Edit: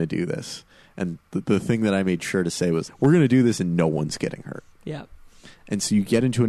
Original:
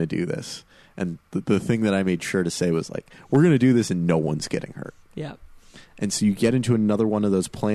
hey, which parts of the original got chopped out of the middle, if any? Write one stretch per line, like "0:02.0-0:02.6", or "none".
0:02.9-0:03.2